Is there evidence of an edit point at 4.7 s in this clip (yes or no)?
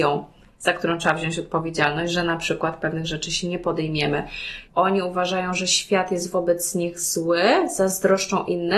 yes